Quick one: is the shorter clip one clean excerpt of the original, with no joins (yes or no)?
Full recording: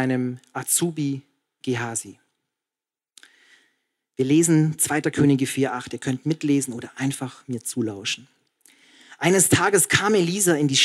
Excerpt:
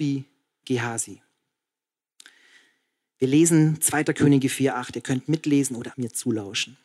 no